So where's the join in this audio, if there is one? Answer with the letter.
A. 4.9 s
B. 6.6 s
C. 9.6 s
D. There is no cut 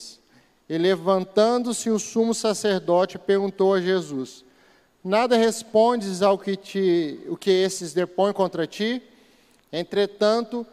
C